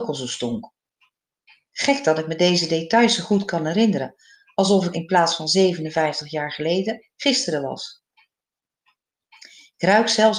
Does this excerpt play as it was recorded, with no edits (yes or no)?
no